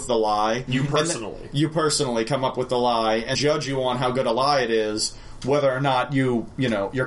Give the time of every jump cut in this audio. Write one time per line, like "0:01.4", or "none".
0:03.3

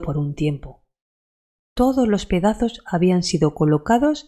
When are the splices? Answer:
0:01.6

